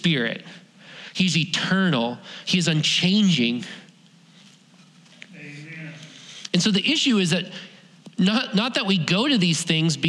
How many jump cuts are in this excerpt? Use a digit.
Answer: 1